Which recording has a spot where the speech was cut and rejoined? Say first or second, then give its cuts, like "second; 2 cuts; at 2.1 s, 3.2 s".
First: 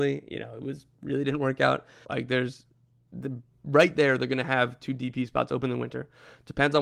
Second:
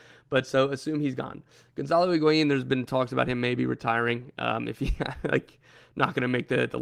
first; 1 cut; at 2.0 s